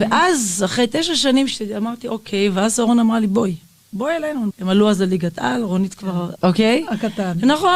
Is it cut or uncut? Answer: cut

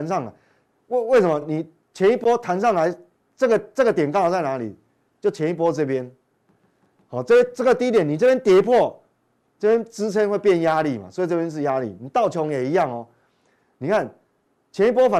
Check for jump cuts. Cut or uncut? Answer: uncut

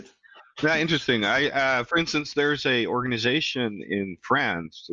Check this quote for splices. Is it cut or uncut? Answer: uncut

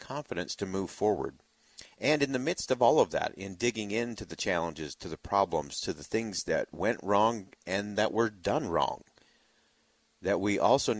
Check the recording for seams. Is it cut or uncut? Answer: uncut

